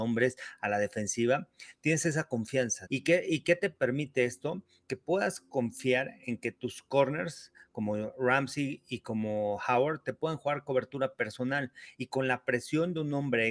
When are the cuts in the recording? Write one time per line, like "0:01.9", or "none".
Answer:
0:02.9